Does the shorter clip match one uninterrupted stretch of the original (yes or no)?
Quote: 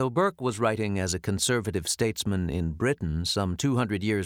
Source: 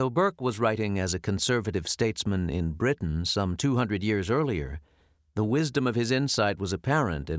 yes